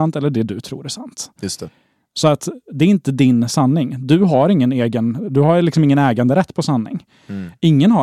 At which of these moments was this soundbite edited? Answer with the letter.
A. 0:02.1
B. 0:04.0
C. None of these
C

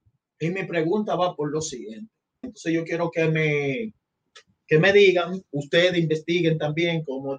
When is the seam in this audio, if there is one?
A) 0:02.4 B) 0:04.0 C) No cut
A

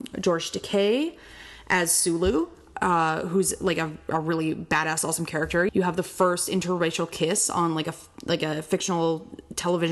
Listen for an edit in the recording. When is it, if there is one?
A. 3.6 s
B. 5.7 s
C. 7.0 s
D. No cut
B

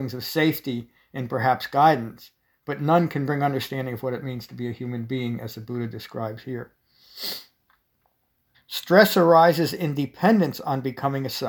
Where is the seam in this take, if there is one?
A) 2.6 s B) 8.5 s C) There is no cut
B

